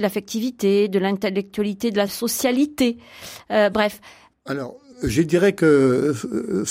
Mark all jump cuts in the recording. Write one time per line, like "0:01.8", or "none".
0:04.3